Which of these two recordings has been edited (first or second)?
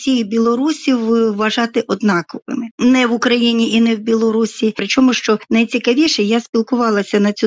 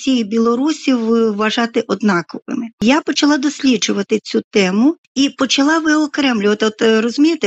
first